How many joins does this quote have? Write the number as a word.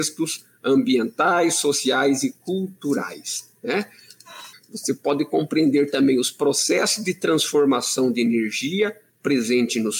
one